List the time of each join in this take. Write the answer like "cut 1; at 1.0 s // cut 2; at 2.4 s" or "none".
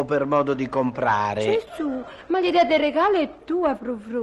none